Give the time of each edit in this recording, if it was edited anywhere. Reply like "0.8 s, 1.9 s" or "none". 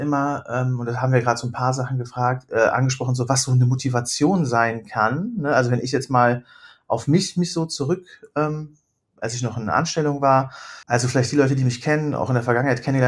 10.8 s